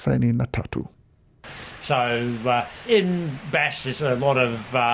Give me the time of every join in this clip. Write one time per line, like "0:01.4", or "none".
0:02.9